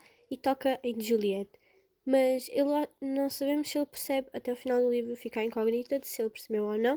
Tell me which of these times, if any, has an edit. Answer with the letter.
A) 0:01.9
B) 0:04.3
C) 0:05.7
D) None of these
D